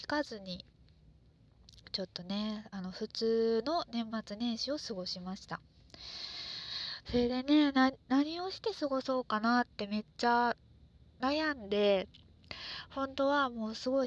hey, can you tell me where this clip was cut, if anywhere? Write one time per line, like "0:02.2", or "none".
0:07.0